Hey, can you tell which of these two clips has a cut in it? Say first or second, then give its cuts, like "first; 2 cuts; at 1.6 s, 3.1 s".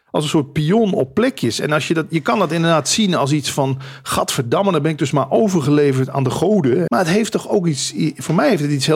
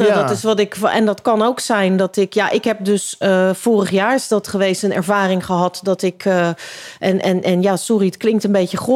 first; 1 cut; at 6.9 s